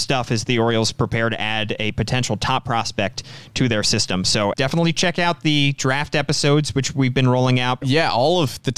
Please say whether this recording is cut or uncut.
cut